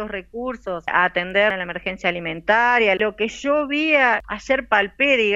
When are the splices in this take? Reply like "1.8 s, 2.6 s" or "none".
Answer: 3.0 s